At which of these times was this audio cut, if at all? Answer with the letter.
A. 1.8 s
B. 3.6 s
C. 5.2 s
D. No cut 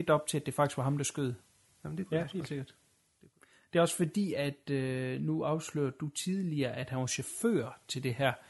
A